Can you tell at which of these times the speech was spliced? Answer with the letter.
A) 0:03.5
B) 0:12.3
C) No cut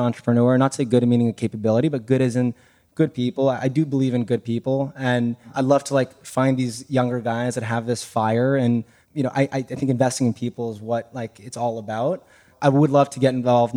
C